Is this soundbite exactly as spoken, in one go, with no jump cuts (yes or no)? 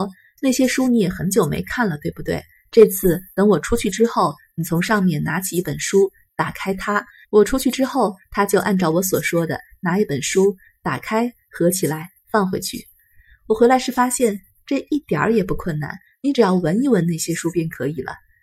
no